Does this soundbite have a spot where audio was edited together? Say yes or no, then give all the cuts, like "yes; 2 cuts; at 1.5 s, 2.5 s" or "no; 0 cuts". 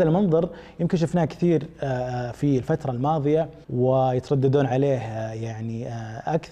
yes; 1 cut; at 3.6 s